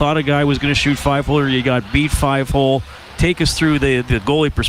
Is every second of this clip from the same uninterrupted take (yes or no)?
yes